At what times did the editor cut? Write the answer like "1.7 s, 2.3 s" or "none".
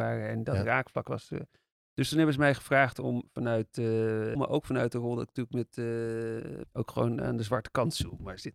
4.4 s, 6.6 s